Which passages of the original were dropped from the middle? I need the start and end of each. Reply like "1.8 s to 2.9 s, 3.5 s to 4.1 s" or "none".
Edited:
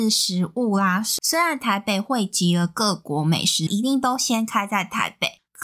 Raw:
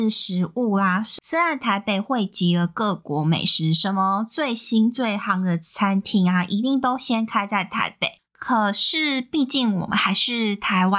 3.7 s to 6.5 s